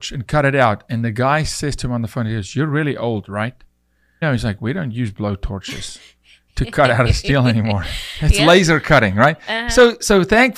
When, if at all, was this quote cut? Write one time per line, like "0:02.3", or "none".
0:04.2